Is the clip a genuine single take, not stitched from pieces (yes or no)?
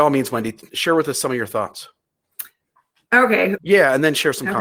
no